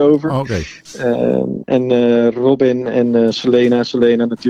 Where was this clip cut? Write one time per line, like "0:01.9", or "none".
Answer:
none